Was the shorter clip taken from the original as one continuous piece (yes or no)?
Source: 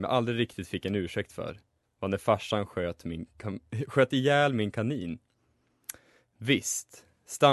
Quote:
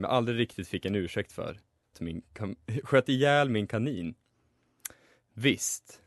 no